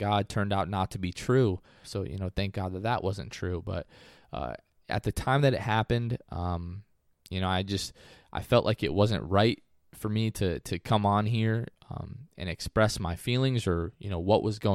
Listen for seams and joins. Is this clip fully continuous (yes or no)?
no